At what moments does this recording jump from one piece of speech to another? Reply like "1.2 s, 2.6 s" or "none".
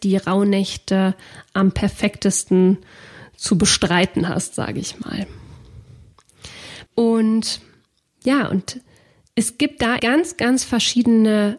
6.9 s, 10.0 s